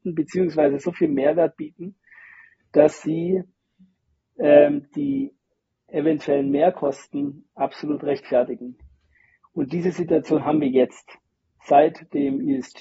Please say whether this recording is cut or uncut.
uncut